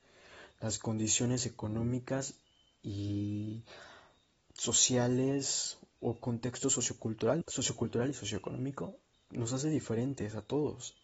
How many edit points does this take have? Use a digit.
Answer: 2